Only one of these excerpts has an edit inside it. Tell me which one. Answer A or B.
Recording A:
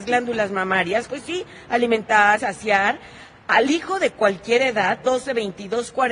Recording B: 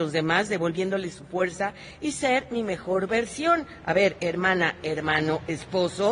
A